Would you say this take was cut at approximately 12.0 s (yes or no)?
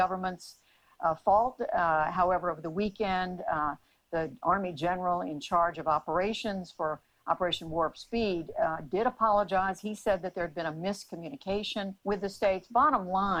yes